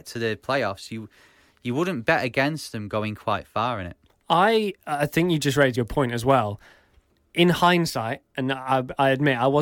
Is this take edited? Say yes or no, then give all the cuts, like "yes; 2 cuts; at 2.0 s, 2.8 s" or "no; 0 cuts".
yes; 1 cut; at 5.7 s